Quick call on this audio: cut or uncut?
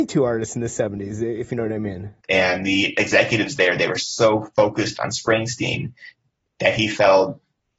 cut